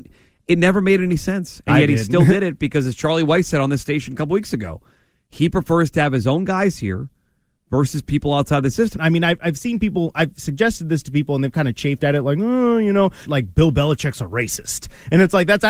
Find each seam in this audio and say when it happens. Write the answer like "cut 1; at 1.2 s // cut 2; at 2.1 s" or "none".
cut 1; at 9.0 s // cut 2; at 13.2 s